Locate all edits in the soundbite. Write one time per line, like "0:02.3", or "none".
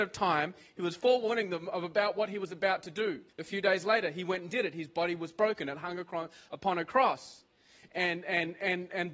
0:03.3